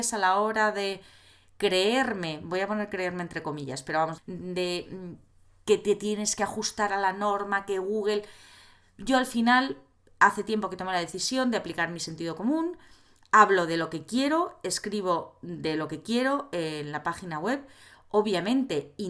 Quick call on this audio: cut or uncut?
cut